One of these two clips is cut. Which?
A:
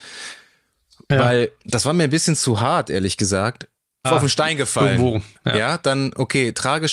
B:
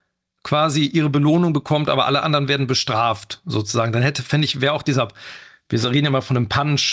A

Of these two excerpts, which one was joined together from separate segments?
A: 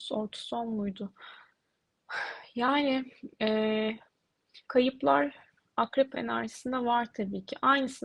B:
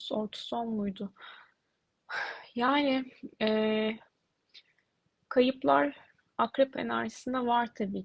A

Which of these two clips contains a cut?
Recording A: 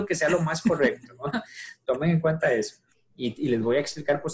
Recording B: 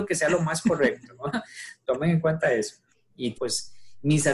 B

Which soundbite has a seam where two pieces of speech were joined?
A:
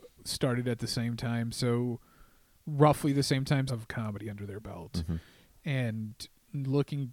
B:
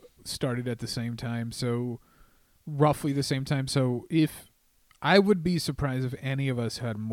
A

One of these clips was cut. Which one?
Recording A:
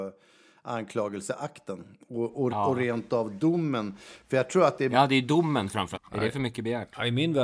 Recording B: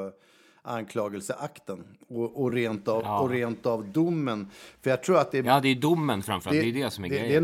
A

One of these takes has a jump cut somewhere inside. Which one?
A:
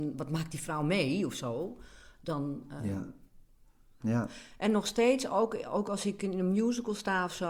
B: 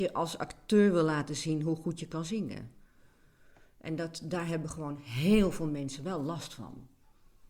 A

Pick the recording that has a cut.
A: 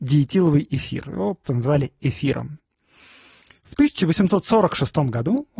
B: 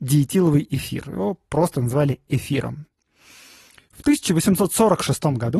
A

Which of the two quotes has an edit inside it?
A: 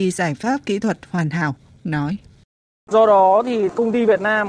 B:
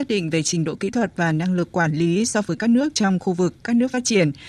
A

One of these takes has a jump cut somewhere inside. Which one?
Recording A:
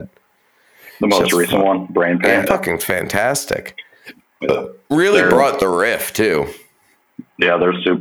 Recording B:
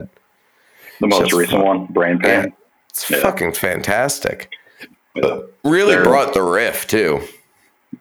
A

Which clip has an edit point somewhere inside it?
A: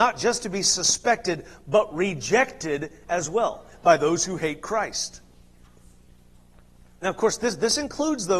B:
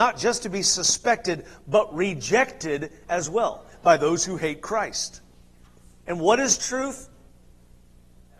B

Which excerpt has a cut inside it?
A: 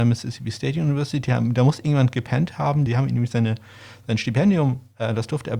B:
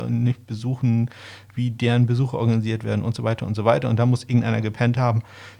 A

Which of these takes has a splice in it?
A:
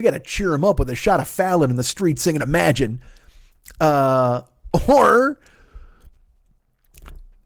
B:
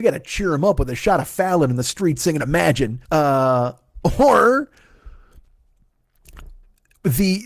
B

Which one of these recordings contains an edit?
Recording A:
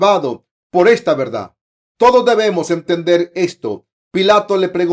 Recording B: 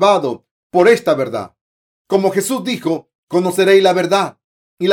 A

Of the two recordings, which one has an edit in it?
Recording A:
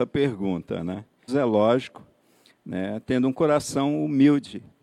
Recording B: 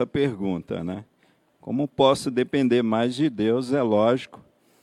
A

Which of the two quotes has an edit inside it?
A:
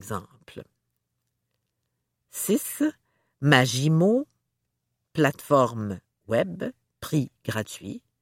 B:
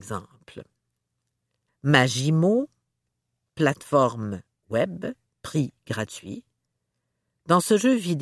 B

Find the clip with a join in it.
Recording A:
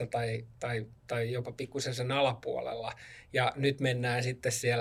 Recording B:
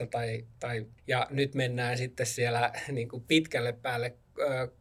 B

